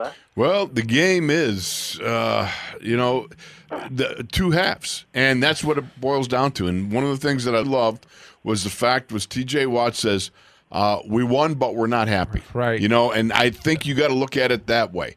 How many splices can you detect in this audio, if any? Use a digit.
1